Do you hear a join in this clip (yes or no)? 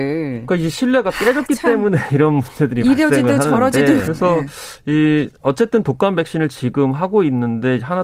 yes